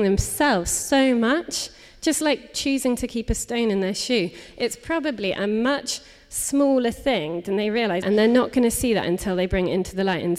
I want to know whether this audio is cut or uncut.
cut